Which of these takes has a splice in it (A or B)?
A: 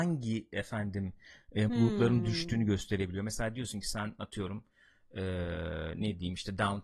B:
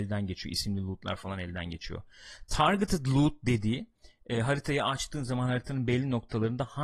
A